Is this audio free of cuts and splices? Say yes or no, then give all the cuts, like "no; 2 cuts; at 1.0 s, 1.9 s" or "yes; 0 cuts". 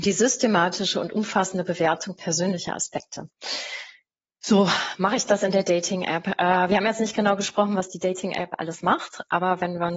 yes; 0 cuts